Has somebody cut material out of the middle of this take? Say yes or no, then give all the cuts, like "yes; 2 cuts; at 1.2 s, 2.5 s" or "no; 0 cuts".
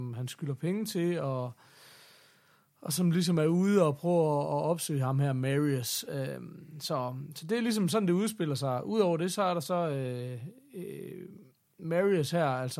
no; 0 cuts